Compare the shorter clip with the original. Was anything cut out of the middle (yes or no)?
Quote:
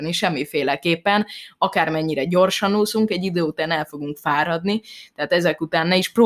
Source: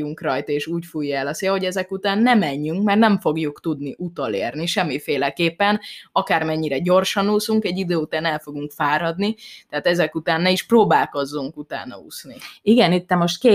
no